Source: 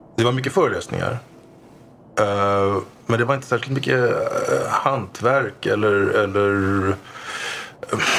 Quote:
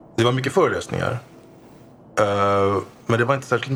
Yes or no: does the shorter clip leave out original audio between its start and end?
no